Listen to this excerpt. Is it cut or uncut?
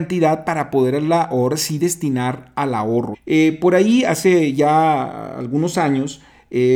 cut